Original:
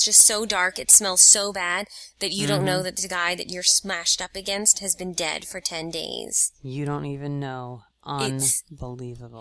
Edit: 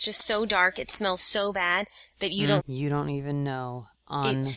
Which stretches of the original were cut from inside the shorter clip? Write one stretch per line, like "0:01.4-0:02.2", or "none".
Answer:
0:02.6-0:06.5